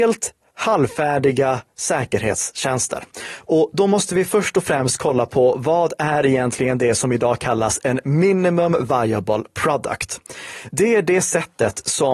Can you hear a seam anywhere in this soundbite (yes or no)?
no